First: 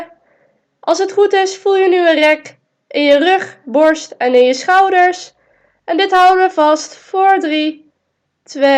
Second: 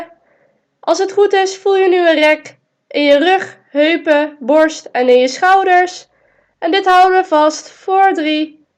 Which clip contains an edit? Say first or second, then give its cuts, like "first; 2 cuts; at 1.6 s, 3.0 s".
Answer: first; 1 cut; at 3.6 s